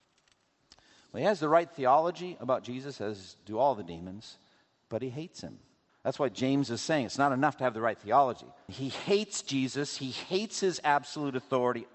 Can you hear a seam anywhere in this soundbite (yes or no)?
yes